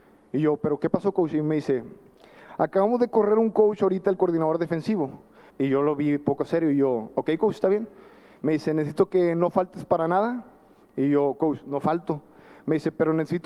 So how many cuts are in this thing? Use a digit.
1